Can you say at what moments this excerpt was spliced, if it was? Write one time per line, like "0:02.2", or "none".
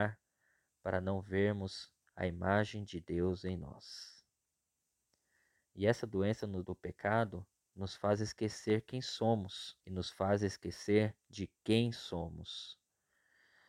0:06.6
0:09.8